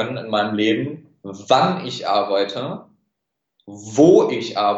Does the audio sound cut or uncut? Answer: uncut